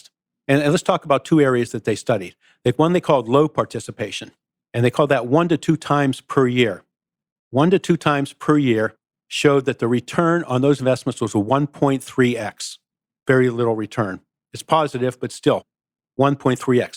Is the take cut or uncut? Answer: uncut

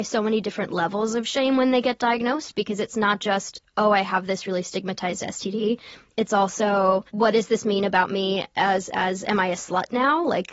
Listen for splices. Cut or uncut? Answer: cut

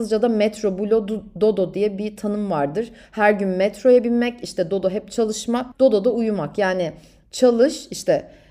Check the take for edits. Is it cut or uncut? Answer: cut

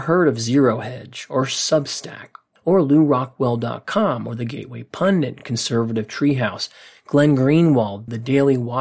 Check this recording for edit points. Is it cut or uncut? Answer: uncut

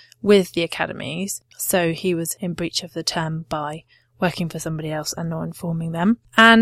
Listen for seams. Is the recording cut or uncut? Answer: cut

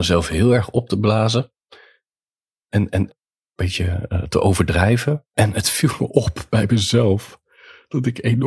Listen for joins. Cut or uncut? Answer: cut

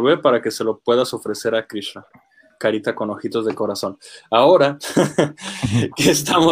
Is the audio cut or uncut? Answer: uncut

